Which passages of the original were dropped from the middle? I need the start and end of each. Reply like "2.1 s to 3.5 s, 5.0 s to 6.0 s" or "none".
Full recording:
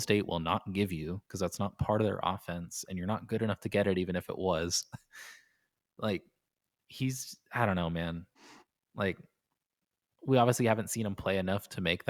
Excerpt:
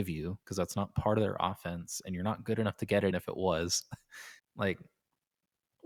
3.9 s to 4.1 s, 5.4 s to 8.8 s

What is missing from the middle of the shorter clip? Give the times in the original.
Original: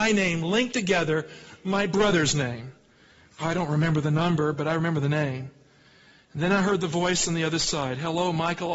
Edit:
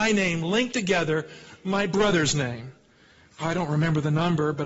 none

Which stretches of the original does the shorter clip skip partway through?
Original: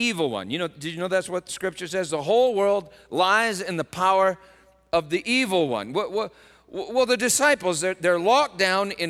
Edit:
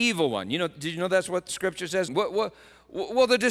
2.1 s to 5.9 s

